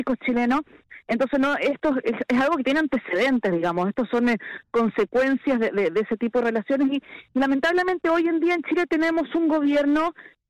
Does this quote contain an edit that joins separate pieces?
no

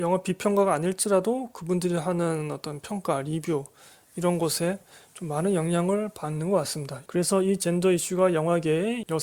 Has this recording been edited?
yes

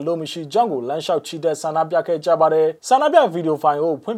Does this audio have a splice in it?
yes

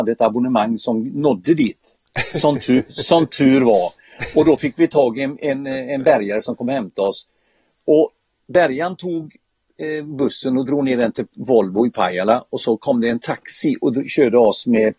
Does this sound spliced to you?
no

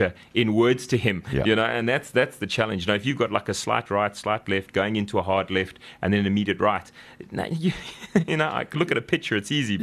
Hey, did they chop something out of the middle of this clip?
no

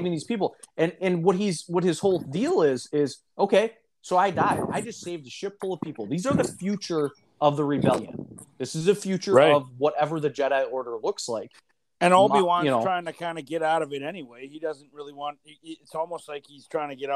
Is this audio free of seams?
yes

